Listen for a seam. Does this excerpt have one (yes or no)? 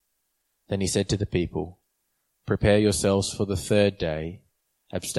no